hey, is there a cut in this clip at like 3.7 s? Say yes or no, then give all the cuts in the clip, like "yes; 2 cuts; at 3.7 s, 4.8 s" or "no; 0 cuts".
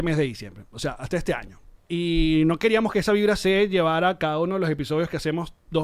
no; 1 cut; at 1.8 s